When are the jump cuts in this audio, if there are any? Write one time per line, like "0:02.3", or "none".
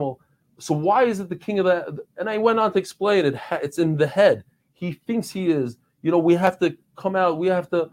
0:04.6

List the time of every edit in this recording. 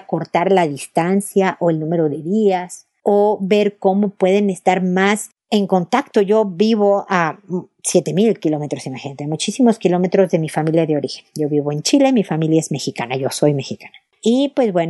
none

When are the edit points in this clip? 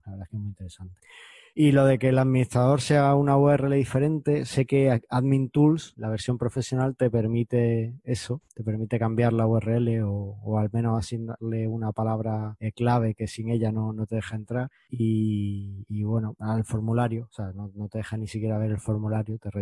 none

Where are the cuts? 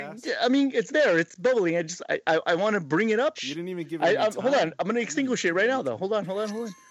0:03.4

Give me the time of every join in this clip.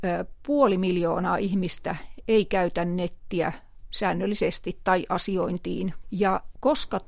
0:06.0

